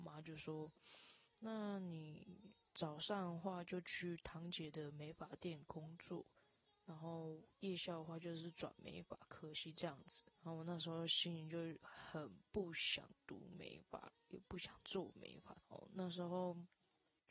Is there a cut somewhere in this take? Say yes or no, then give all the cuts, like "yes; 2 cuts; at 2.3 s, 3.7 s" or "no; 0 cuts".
yes; 2 cuts; at 10.3 s, 15.6 s